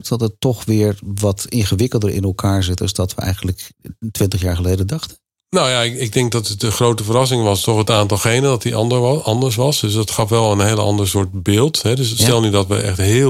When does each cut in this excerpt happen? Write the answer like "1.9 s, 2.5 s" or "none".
none